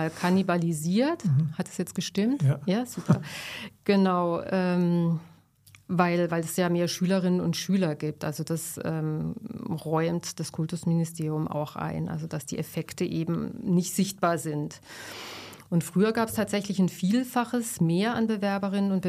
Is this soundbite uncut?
yes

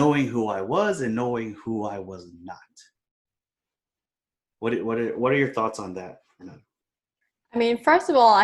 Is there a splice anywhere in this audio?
no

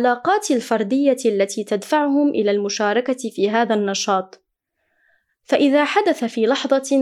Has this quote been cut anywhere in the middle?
no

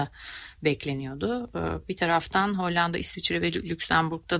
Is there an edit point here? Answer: no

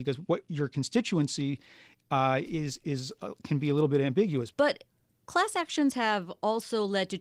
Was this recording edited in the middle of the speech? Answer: yes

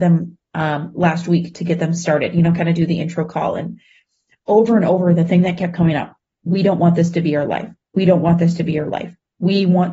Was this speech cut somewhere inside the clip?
no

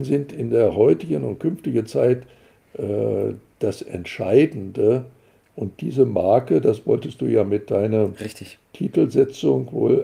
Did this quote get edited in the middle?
no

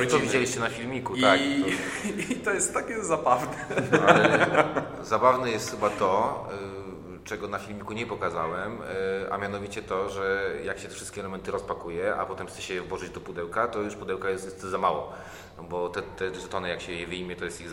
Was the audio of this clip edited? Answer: no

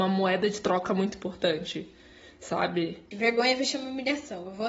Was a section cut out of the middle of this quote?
yes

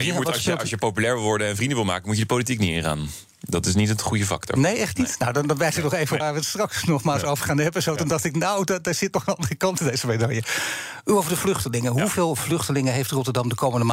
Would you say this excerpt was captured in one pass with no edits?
no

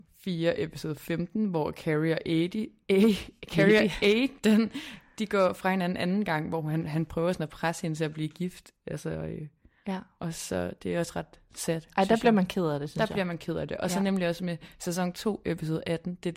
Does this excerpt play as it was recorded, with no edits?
yes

